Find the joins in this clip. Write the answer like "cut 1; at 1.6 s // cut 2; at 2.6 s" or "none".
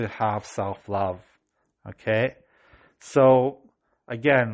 none